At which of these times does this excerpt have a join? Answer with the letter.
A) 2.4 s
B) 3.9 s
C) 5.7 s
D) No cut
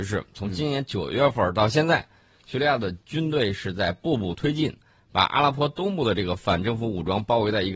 D